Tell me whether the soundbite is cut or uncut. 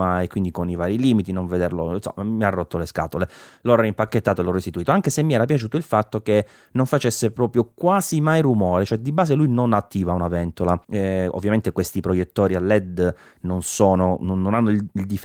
cut